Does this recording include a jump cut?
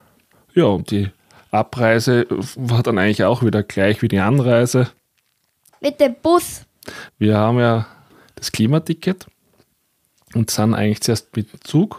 yes; 2 cuts; at 5.7 s, 7.1 s

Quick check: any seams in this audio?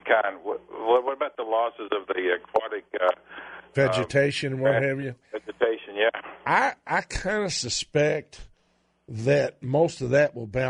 no; 0 cuts

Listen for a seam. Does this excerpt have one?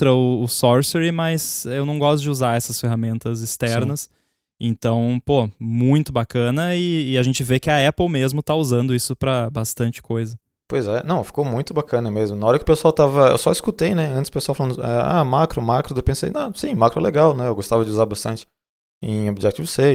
no; 0 cuts

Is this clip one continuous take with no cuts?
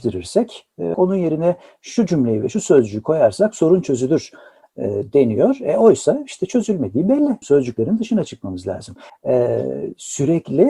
no; 3 cuts; at 0.9 s, 7.4 s, 9.1 s

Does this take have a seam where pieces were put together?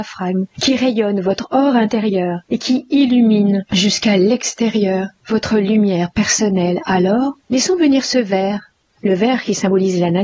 yes; 1 cut; at 8.9 s

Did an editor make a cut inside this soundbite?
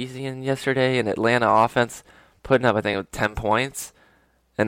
no; 0 cuts

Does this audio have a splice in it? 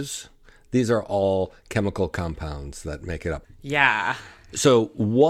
yes; 1 cut; at 3.4 s

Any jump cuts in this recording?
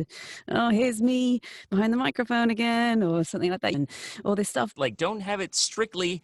yes; 2 cuts; at 3.7 s, 4.8 s

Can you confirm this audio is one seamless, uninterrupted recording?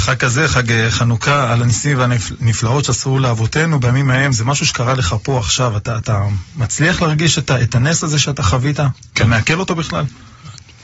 yes; 0 cuts

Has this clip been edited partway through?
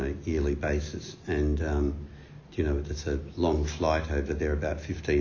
no; 0 cuts

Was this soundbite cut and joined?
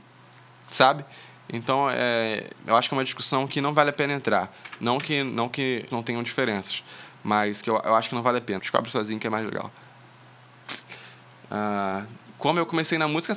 yes; 2 cuts; at 5.9 s, 8.6 s

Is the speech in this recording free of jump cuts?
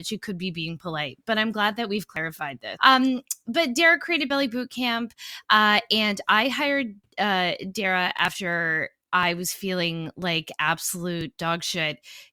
no; 1 cut; at 2.8 s

